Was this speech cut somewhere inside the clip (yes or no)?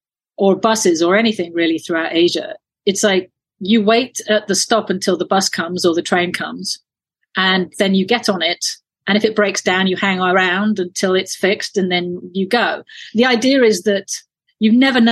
no